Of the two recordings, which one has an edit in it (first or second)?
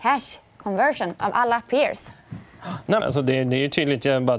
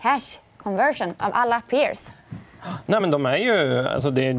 first